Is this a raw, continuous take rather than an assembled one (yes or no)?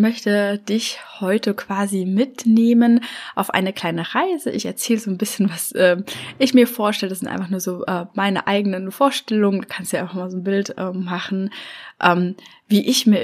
yes